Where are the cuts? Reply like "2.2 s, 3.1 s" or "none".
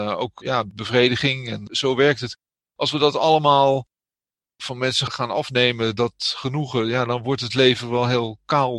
none